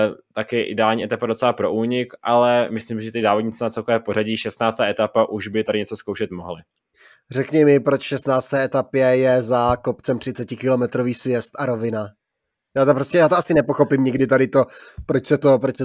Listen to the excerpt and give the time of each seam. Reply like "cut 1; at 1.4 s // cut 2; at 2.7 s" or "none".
none